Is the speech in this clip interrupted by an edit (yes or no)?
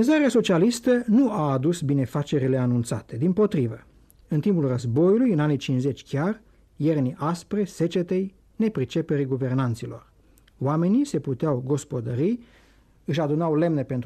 yes